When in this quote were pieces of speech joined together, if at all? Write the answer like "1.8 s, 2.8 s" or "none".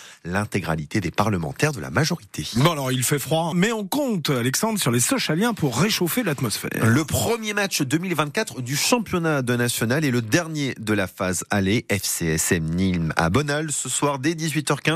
3.5 s